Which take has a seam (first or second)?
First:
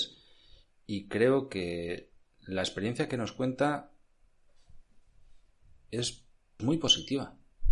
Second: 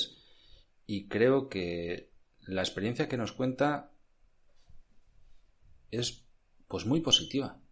first